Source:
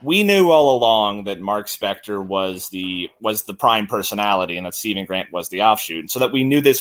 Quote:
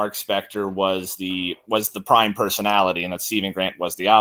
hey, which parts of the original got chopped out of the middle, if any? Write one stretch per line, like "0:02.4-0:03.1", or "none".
none